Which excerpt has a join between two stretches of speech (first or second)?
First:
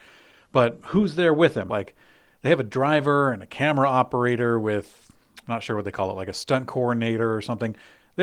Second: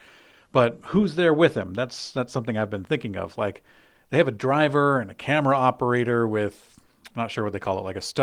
first